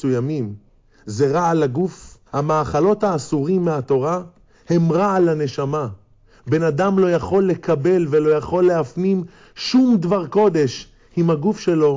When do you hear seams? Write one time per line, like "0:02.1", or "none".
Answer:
0:02.3